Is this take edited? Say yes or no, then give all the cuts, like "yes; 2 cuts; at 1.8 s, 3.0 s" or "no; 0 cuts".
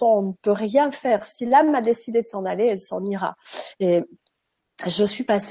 no; 0 cuts